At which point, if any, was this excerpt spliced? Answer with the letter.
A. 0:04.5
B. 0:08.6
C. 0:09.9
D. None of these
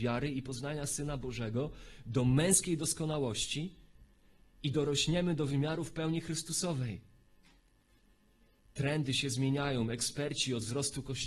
B